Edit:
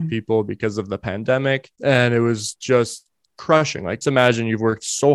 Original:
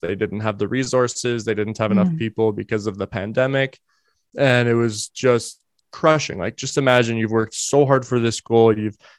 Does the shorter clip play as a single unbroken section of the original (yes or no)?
no